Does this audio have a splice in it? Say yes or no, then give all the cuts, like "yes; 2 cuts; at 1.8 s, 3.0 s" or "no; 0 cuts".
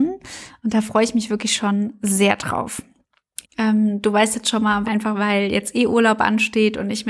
yes; 2 cuts; at 3.4 s, 4.8 s